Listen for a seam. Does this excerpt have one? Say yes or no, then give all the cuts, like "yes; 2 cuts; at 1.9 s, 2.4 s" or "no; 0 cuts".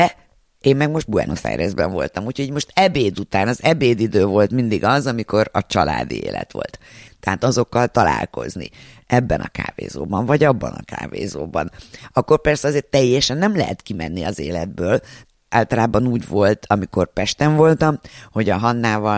yes; 1 cut; at 7.1 s